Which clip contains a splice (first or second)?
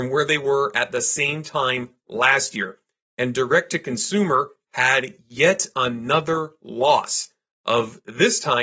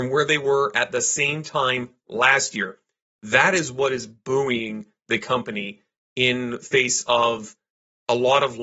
second